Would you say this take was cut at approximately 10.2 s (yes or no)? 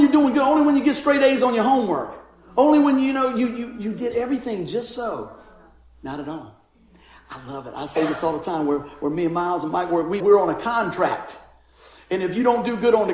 yes